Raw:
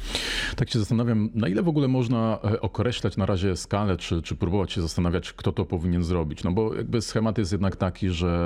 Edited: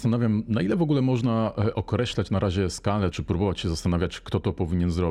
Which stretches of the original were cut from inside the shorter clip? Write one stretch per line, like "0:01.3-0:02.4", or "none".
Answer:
0:04.0-0:04.2